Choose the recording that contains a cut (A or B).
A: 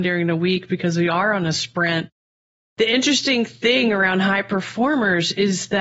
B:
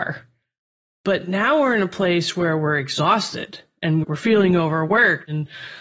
B